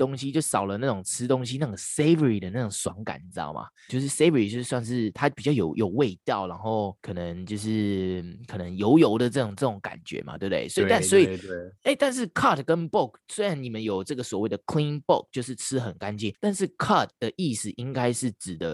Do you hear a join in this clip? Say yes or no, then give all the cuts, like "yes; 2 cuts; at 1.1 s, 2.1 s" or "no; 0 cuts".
yes; 1 cut; at 3.9 s